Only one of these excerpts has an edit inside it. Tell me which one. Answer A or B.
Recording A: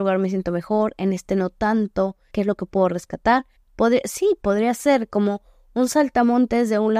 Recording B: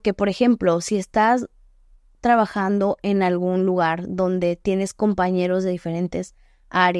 A